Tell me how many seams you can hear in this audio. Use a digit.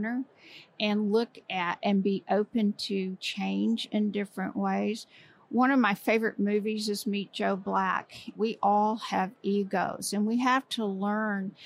1